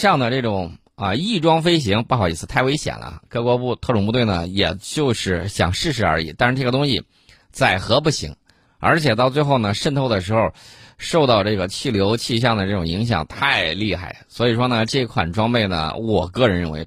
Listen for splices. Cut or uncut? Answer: uncut